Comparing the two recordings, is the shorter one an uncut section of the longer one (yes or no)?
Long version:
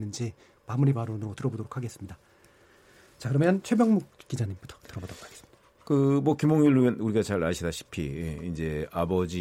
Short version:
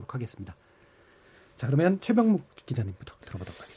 yes